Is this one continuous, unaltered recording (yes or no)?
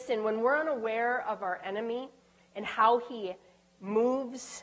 yes